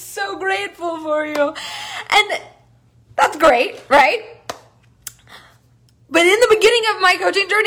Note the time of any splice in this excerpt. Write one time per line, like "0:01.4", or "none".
none

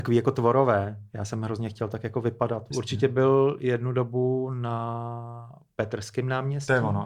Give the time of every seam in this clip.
0:02.7

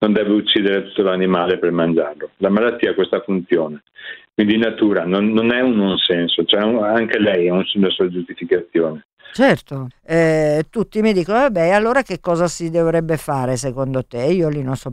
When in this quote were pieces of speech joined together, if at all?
0:09.9

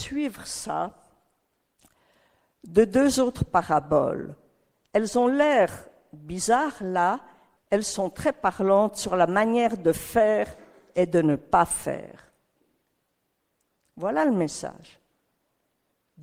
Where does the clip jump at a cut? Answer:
0:07.6
0:13.8

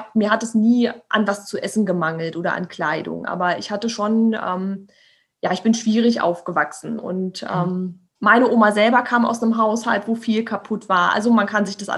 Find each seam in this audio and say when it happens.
0:07.0
0:08.2

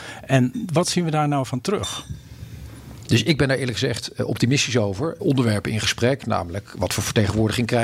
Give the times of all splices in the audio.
0:03.0
0:05.2

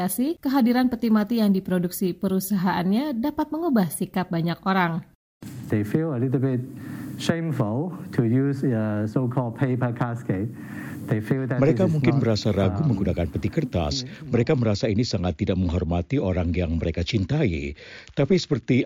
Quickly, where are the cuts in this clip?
none

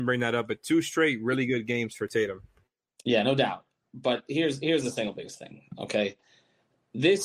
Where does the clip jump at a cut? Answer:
none

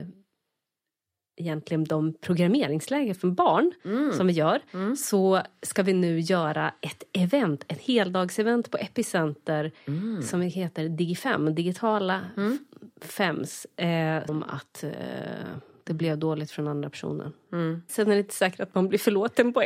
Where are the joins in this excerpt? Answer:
0:14.3
0:17.9

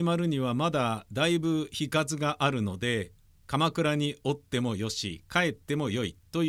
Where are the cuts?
none

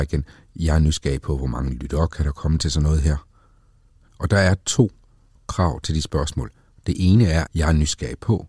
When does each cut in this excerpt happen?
0:04.1
0:07.5

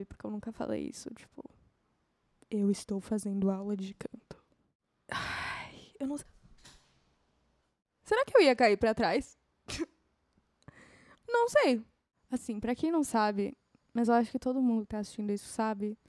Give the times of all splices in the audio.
none

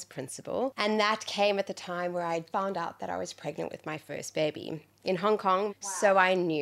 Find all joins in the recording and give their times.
0:02.5
0:05.7

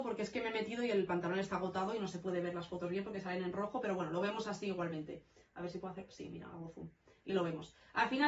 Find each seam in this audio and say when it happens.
none

